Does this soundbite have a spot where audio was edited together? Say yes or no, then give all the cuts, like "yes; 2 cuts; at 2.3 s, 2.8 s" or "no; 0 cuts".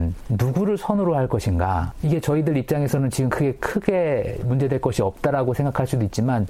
no; 0 cuts